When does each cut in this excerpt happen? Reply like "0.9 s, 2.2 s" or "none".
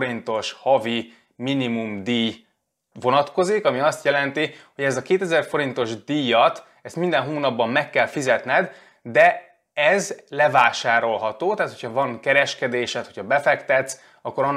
none